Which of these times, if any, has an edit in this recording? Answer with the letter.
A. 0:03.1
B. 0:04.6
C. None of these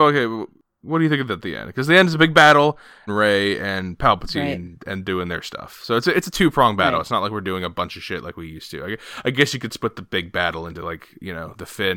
A